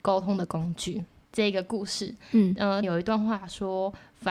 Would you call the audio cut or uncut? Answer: cut